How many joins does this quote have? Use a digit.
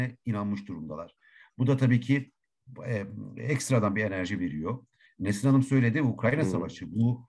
1